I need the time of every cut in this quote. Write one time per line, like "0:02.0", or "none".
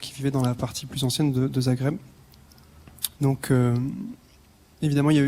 0:03.1